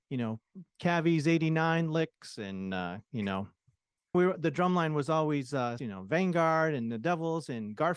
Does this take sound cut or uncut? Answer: cut